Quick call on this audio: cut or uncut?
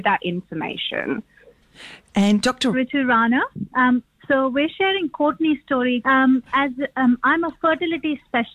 cut